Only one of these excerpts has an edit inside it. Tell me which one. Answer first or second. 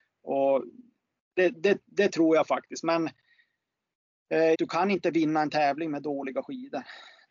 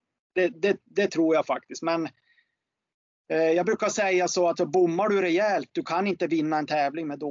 first